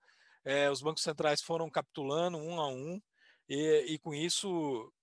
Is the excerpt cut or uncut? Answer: uncut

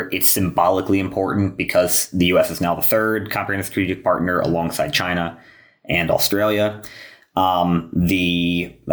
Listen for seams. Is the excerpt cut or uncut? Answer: uncut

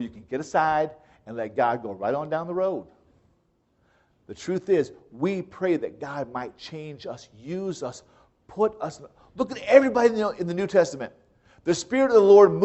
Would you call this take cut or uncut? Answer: uncut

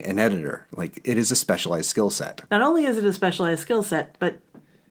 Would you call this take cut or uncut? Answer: cut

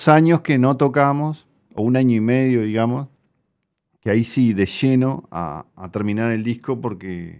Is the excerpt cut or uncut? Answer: uncut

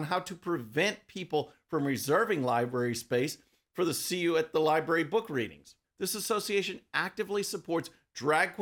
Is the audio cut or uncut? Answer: cut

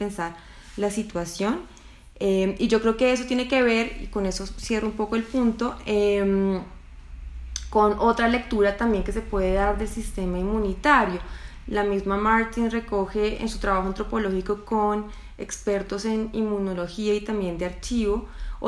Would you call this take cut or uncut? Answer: uncut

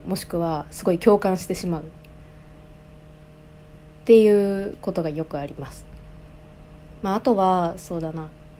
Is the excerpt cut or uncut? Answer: uncut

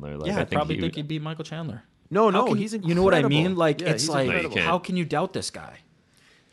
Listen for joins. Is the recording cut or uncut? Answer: cut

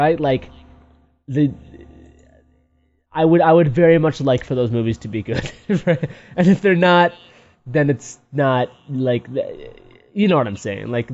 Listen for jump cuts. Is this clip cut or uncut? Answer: uncut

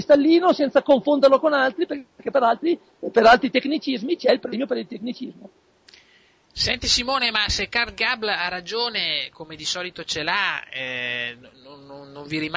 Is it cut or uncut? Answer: uncut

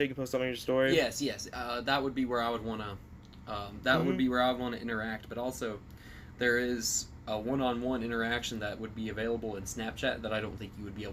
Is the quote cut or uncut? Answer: uncut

